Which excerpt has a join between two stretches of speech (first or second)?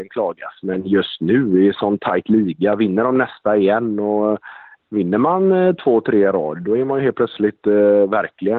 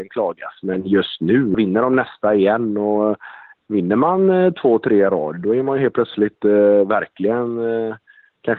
second